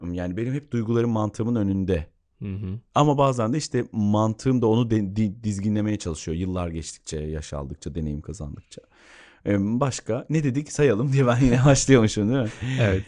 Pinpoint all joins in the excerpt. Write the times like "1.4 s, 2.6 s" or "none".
none